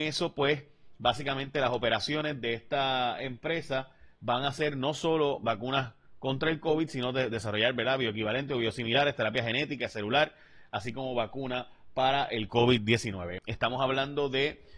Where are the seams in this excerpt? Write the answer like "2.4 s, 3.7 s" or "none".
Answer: 13.4 s